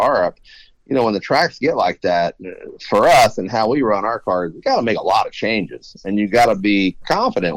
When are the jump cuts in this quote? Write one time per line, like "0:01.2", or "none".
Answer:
none